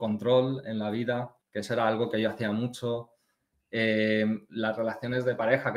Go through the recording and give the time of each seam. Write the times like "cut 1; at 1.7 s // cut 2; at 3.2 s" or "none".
cut 1; at 1.4 s